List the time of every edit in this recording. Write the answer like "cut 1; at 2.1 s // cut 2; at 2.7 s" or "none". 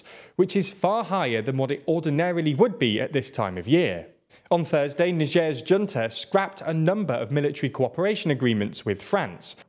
cut 1; at 4.3 s